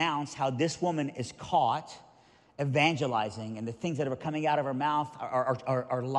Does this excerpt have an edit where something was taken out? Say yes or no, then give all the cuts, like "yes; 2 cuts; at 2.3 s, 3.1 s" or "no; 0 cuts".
no; 0 cuts